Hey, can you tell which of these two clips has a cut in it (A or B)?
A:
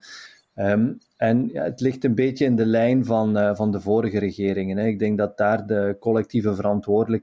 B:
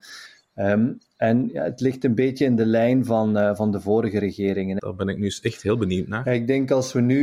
B